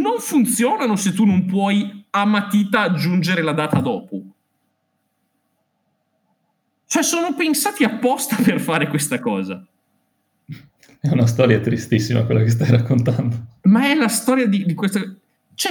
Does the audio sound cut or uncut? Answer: uncut